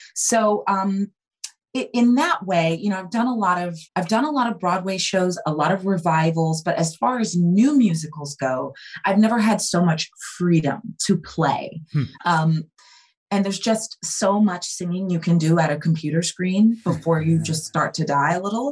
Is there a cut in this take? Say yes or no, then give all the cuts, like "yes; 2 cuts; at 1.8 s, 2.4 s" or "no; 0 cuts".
yes; 2 cuts; at 3.9 s, 12.2 s